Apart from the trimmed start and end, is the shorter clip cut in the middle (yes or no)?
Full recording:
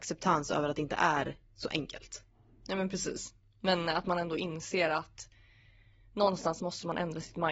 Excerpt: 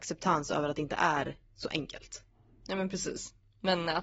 no